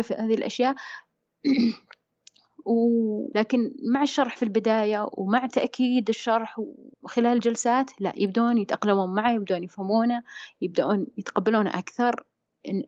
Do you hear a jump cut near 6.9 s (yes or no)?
yes